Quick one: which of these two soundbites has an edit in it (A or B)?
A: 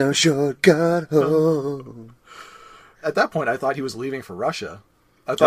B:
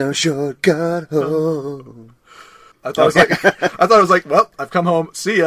B